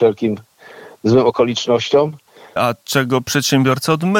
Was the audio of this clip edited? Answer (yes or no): yes